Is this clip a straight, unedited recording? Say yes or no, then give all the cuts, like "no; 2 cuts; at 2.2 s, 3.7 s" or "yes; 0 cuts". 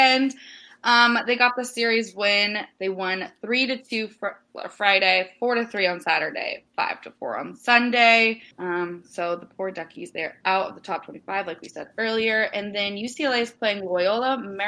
no; 1 cut; at 8.5 s